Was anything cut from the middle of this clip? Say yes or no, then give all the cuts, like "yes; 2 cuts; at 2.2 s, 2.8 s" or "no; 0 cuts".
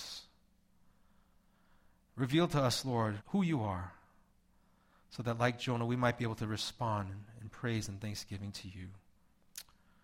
yes; 1 cut; at 3.2 s